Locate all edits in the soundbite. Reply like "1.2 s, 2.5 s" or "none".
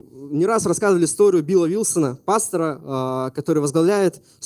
none